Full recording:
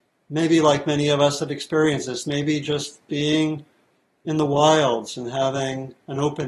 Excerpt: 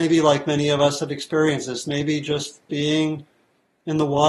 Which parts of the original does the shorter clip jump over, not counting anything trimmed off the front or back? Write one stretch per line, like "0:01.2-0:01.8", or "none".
none